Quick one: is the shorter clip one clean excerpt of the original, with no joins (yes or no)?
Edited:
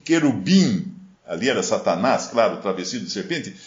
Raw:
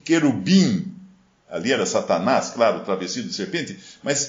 no